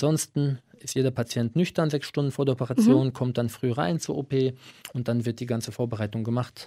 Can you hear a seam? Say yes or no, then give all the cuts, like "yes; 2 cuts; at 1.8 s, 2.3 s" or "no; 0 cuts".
no; 0 cuts